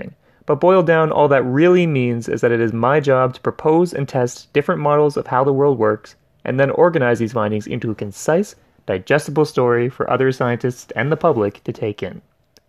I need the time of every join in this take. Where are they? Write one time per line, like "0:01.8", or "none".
none